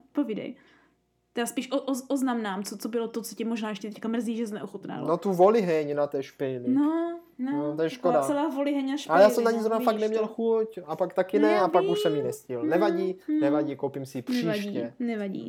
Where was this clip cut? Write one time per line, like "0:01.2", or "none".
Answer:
none